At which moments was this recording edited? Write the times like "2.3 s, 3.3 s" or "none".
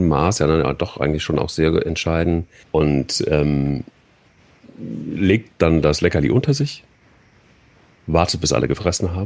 2.6 s